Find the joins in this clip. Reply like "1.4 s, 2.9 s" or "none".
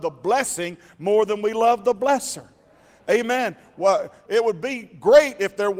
4.3 s